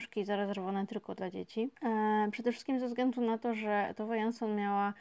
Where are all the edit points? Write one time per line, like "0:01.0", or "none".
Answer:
0:01.7

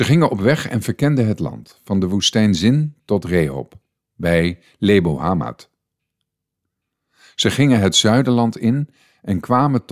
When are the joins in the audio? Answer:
none

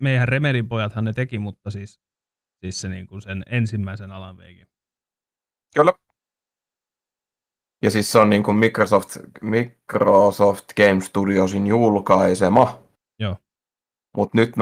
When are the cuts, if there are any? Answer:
none

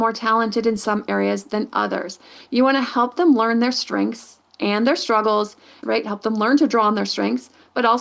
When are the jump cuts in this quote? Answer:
0:05.8

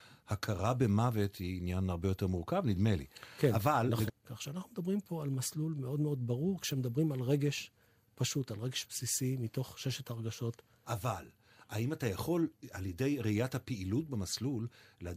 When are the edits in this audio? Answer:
0:04.1
0:10.8

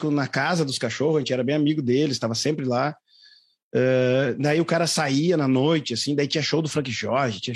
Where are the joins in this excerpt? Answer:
none

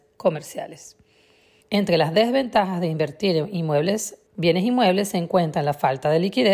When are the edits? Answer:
0:01.6
0:04.3

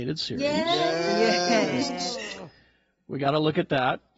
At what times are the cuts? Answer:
none

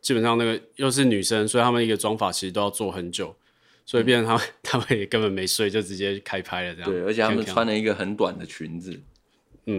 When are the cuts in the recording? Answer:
none

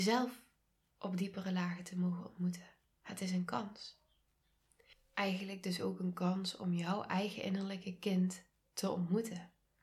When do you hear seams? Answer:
none

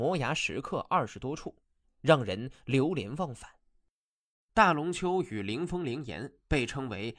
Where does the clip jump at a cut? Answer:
0:01.8
0:04.5

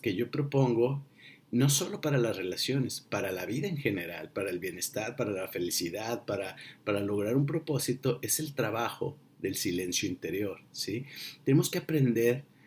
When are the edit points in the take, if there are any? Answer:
none

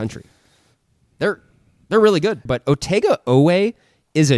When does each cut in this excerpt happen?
0:02.5

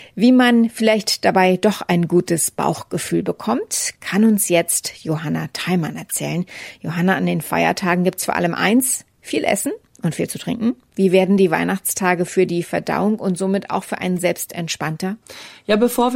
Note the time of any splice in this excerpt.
none

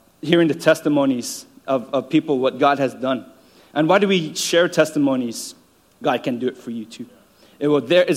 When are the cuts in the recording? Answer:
0:05.9

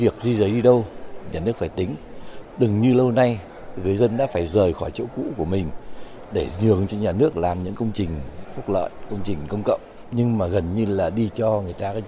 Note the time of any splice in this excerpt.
none

